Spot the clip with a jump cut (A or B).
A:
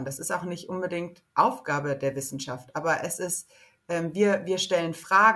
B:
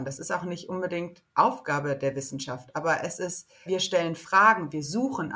B